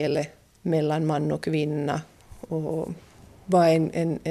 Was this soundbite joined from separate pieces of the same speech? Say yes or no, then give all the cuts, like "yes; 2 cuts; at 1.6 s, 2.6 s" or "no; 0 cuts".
no; 0 cuts